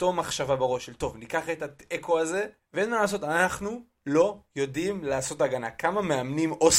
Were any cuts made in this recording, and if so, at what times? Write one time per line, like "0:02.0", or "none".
0:02.6